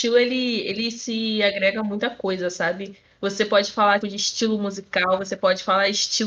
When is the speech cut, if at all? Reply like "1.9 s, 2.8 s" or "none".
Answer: 4.0 s